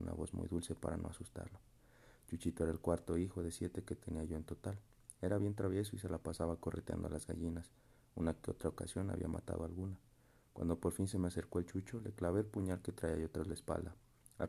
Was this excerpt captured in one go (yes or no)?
yes